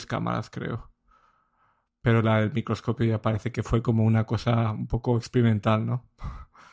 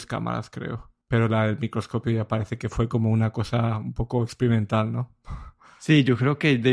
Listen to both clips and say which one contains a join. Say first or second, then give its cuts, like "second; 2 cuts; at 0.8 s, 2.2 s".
second; 1 cut; at 1.0 s